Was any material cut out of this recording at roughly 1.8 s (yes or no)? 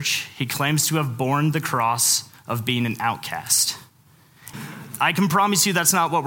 no